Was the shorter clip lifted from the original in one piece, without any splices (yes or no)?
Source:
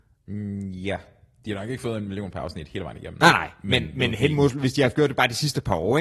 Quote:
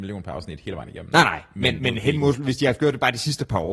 no